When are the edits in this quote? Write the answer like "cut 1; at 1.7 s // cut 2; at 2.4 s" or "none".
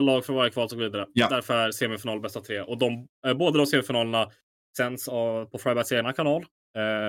none